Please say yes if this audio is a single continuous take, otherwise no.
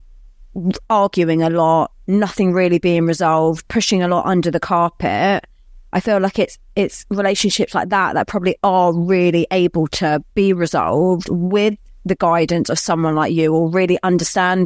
yes